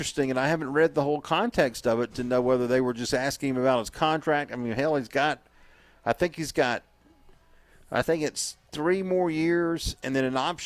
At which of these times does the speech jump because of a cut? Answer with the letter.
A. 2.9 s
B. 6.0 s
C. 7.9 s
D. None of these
D